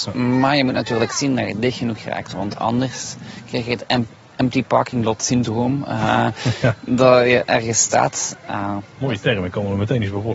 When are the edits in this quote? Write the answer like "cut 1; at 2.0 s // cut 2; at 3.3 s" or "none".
none